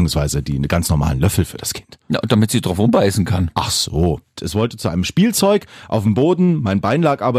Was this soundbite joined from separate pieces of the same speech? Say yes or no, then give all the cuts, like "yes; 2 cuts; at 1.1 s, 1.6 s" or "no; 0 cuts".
yes; 1 cut; at 4.4 s